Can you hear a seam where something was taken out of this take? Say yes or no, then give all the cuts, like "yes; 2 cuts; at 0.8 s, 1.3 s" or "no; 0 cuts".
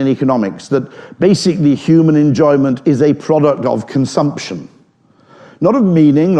no; 0 cuts